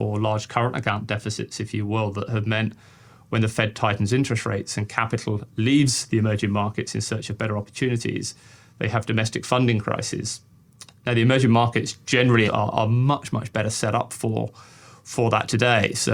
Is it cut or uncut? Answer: cut